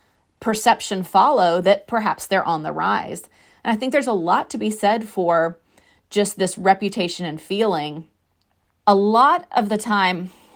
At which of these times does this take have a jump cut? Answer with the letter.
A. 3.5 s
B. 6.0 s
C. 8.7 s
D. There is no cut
C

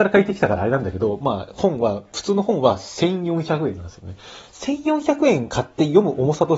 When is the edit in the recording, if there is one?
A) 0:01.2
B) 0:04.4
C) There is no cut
C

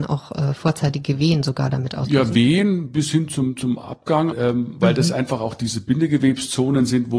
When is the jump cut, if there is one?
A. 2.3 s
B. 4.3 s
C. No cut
B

